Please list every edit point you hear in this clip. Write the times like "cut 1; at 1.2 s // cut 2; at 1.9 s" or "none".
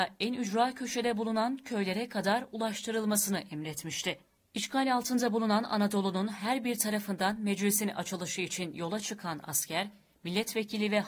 none

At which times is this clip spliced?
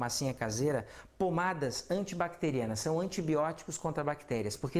none

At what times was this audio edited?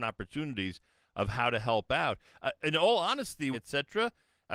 cut 1; at 3.5 s

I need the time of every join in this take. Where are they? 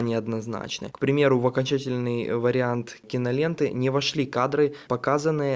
none

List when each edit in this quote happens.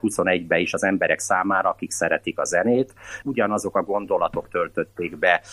cut 1; at 1.6 s // cut 2; at 3.2 s

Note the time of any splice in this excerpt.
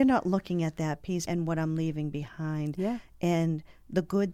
cut 1; at 1.3 s

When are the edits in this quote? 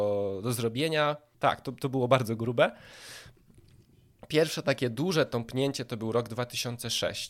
cut 1; at 1.3 s

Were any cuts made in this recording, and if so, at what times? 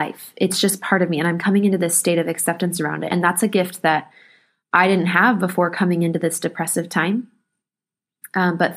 none

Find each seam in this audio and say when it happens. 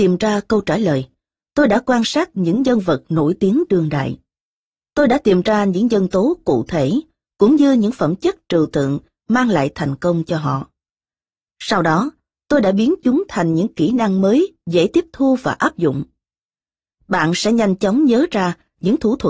none

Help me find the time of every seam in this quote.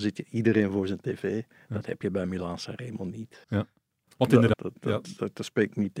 cut 1; at 3.4 s // cut 2; at 4.5 s

